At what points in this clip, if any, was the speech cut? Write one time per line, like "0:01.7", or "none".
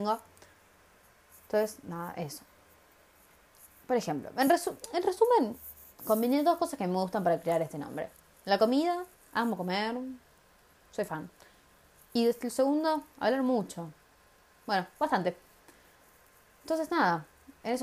none